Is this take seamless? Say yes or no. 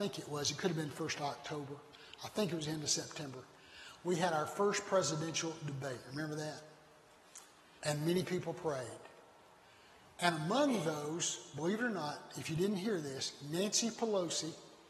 no